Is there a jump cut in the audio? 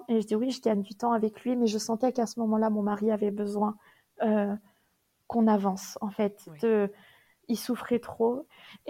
no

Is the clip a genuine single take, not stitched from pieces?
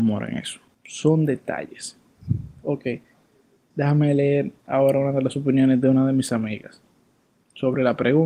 yes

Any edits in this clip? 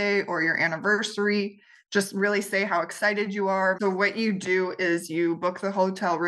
yes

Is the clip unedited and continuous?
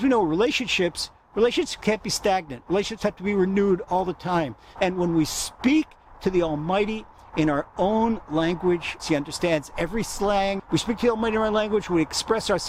no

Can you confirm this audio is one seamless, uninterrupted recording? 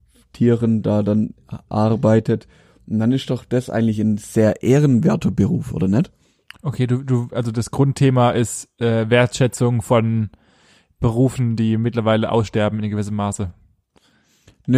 yes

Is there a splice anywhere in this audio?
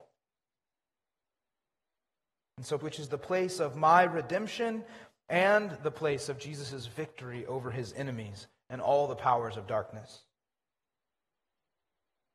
yes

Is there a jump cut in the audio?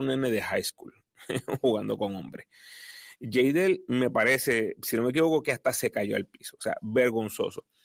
yes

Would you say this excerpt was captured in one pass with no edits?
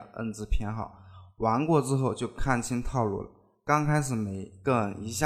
yes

